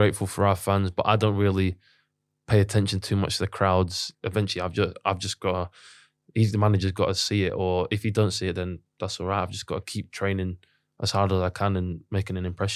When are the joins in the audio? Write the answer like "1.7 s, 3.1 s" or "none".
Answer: 4.1 s